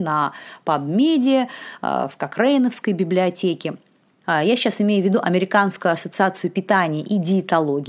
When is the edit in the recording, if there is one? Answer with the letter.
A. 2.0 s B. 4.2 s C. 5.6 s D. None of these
B